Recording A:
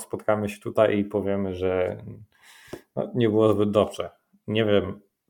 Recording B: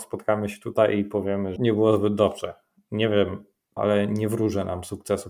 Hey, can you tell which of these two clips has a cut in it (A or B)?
B